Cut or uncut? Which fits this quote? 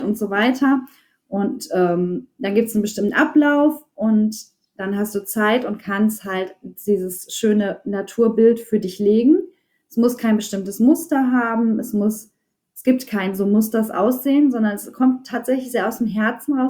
uncut